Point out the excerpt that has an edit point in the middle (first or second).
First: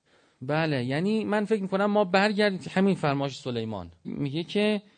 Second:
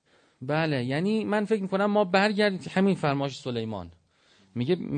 first